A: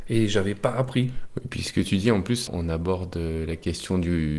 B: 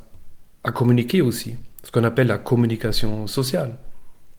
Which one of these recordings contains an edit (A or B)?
A